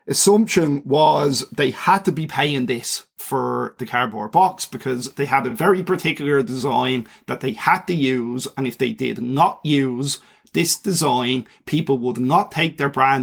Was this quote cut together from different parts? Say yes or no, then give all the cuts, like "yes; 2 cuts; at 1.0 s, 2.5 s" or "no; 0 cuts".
no; 0 cuts